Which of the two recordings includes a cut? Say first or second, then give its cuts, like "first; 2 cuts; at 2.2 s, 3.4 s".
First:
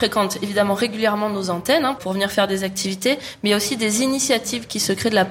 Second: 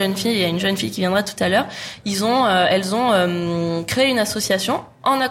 first; 1 cut; at 2.0 s